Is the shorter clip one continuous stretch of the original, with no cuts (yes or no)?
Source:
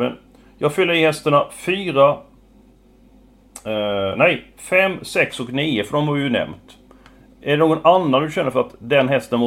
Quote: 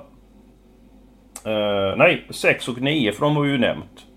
no